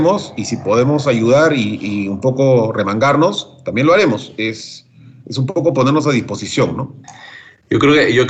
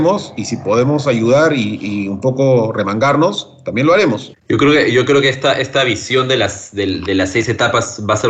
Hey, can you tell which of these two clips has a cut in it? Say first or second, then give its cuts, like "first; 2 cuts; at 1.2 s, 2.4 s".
second; 1 cut; at 4.3 s